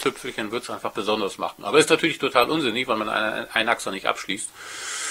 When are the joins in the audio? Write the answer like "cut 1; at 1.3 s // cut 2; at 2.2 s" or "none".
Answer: none